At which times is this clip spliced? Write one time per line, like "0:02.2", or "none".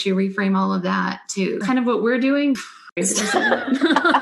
0:01.6
0:03.0